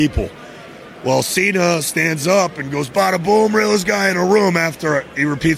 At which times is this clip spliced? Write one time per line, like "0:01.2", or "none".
none